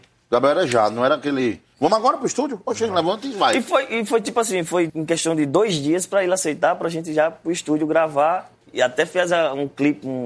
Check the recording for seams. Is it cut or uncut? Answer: cut